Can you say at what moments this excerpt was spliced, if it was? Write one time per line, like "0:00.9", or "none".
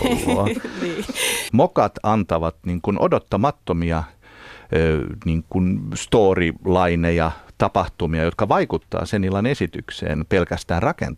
0:01.5

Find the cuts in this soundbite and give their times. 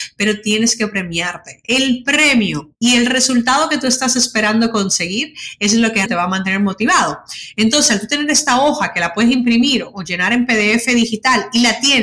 0:06.1

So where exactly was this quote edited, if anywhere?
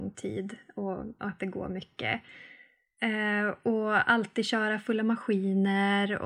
none

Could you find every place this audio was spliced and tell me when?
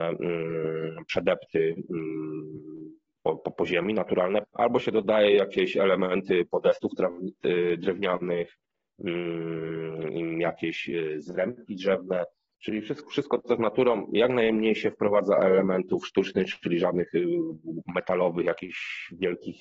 0:04.4

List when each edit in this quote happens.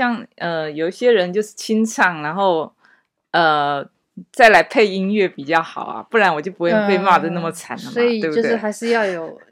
none

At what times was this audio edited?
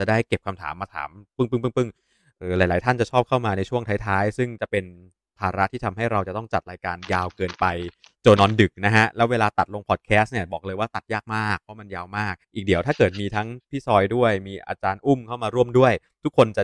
0:08.4
0:12.4

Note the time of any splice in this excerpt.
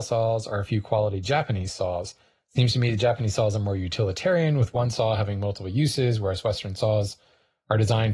none

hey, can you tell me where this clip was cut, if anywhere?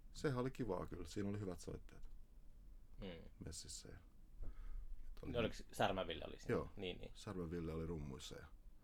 0:04.4

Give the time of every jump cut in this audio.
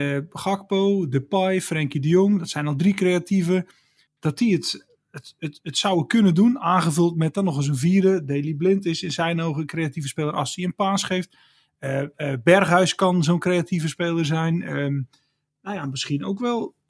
none

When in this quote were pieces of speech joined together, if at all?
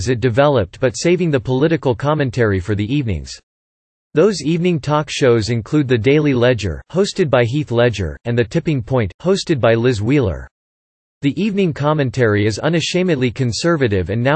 none

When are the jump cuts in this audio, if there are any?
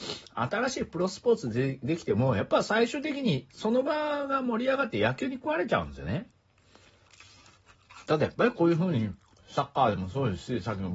0:08.1

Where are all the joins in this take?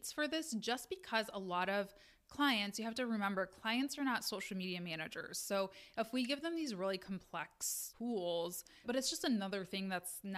0:08.8

